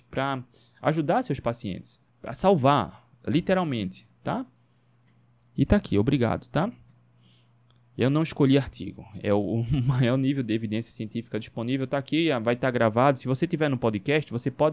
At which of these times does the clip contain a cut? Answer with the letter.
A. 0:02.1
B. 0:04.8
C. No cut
A